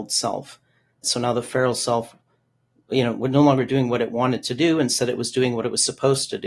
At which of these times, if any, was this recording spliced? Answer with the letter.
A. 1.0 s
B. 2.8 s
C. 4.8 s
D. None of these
A